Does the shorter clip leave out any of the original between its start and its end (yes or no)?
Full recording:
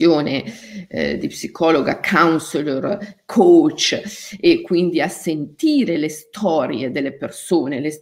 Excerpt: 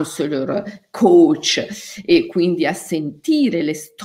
no